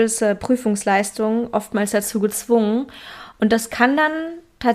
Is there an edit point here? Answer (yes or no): no